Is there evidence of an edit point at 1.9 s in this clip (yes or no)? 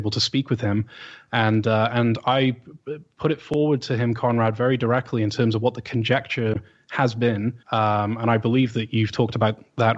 no